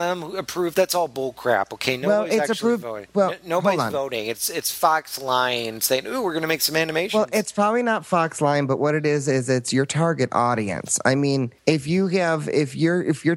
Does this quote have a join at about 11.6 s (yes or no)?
yes